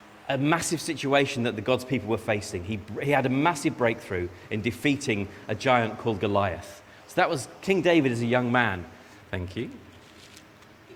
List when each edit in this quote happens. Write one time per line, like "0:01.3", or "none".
0:07.0
0:09.2

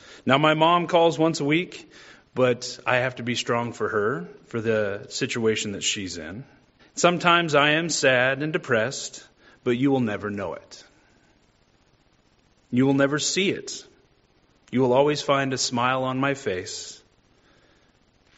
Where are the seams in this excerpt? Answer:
0:06.8

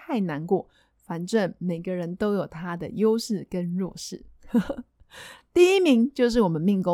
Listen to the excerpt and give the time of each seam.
none

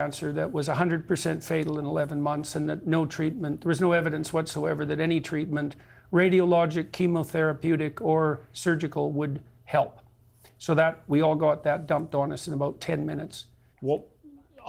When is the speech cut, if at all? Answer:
0:13.7

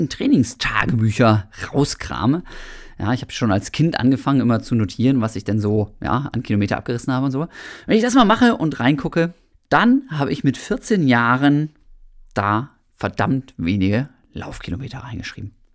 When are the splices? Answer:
0:09.5

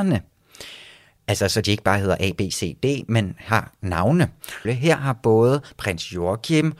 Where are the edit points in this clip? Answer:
0:04.6

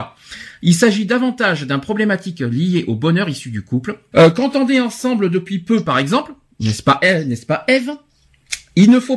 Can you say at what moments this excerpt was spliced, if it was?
0:04.1

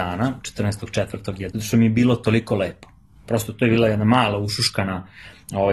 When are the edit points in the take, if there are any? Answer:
0:01.5

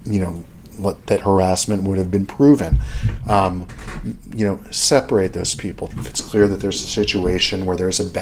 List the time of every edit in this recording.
0:05.9

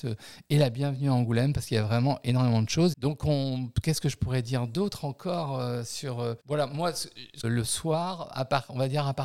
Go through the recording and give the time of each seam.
0:02.9
0:06.4
0:07.4

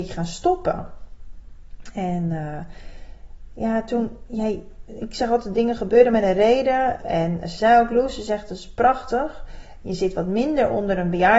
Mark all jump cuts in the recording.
0:07.0
0:09.8

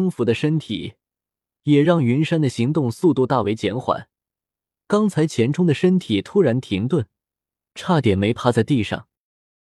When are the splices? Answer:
none

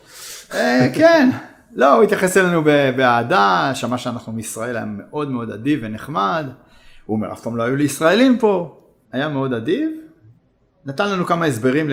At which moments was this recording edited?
0:09.0

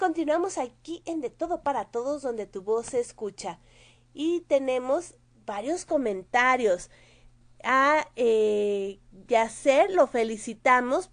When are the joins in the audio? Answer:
none

